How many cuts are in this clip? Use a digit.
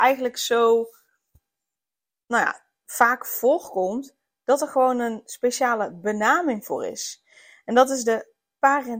0